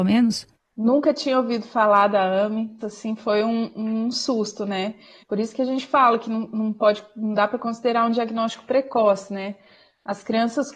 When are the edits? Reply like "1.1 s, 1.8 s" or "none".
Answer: 2.8 s, 5.2 s